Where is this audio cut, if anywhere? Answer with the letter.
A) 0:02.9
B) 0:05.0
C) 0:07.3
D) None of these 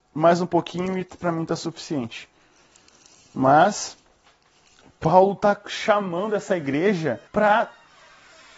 C